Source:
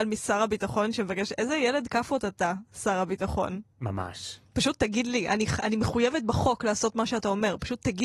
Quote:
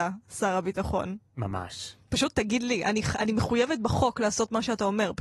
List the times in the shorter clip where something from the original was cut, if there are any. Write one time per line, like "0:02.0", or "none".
none